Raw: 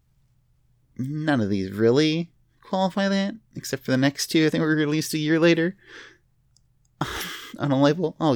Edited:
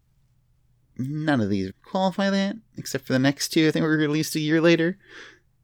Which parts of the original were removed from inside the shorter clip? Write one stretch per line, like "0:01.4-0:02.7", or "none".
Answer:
0:01.7-0:02.5